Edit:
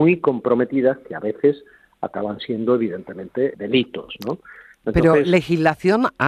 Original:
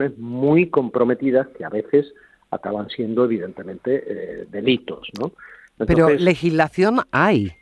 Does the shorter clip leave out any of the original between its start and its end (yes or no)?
yes